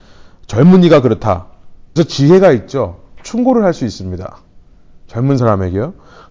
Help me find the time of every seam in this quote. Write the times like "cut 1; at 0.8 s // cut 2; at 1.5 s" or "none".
cut 1; at 2.0 s

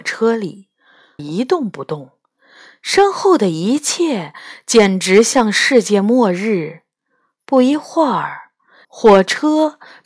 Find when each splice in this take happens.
cut 1; at 1.2 s // cut 2; at 8.8 s

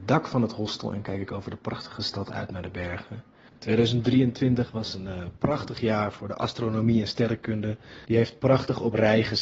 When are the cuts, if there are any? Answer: cut 1; at 3.5 s // cut 2; at 8.0 s

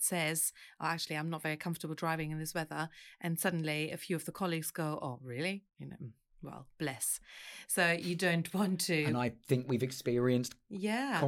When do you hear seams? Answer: none

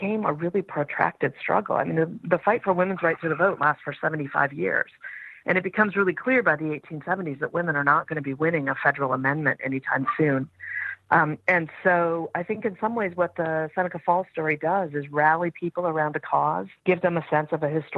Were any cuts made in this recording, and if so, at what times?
cut 1; at 16.8 s

